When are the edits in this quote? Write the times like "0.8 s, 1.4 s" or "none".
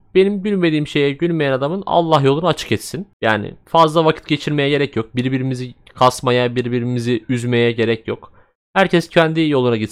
none